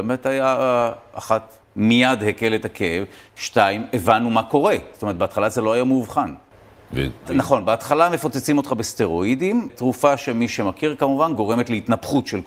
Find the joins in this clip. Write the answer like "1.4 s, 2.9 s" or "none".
7.2 s